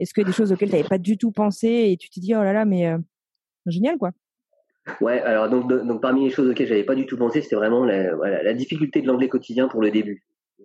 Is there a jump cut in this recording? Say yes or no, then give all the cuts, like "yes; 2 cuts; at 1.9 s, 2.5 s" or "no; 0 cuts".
no; 0 cuts